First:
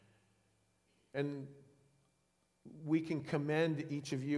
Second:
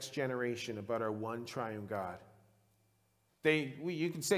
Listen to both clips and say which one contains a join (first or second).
second